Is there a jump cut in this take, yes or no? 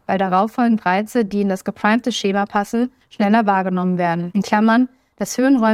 no